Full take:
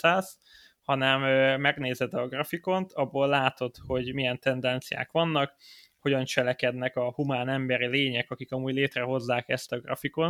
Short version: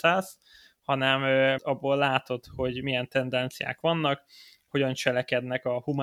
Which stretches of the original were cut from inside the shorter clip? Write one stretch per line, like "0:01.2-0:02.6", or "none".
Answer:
0:01.6-0:02.9